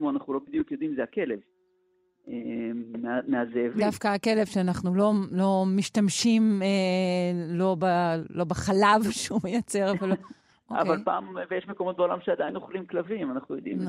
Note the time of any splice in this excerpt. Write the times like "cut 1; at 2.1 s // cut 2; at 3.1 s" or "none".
none

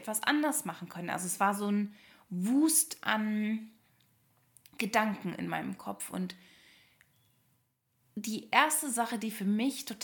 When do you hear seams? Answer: none

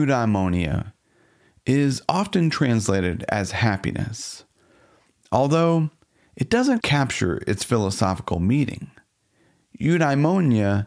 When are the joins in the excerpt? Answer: cut 1; at 6.8 s

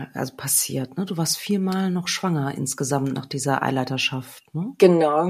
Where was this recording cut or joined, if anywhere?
none

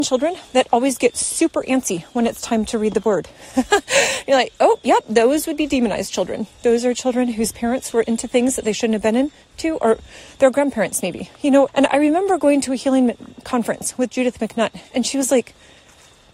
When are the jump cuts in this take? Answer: cut 1; at 11.7 s

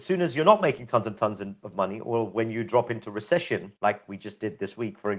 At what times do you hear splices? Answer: cut 1; at 3.8 s

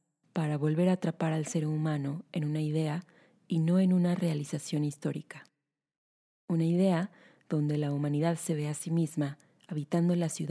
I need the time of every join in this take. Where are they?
none

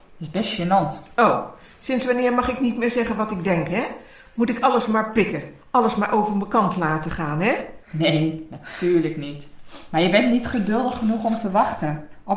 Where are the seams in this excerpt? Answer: cut 1; at 7.8 s

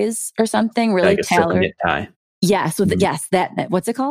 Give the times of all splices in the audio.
none

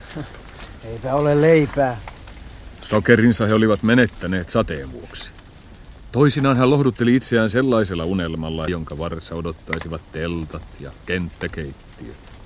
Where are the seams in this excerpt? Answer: cut 1; at 2.8 s // cut 2; at 6.1 s // cut 3; at 8.7 s

